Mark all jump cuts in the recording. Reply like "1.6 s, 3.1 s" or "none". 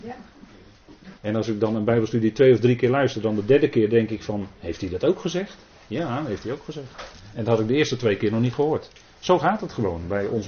1.2 s